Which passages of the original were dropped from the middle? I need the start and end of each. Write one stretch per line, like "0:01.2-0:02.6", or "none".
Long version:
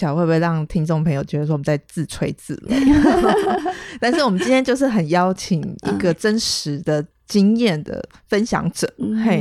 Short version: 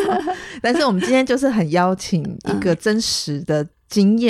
none